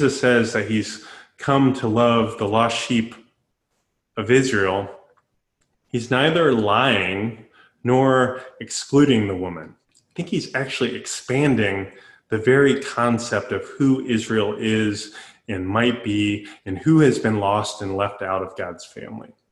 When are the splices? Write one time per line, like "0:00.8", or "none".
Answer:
0:09.8